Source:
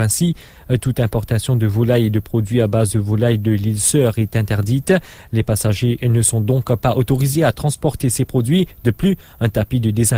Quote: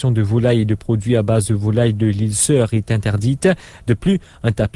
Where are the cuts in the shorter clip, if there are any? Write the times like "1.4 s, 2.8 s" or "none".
3.8 s